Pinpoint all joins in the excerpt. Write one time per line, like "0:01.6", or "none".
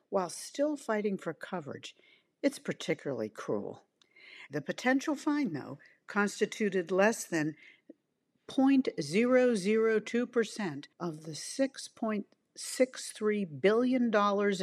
0:04.5
0:10.9